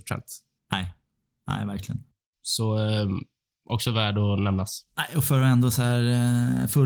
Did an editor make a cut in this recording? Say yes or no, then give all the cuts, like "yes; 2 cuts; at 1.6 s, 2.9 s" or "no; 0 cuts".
no; 0 cuts